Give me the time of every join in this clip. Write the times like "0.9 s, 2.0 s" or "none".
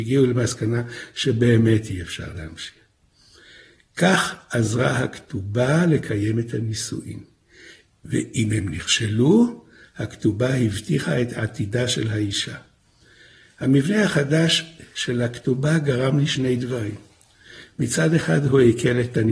none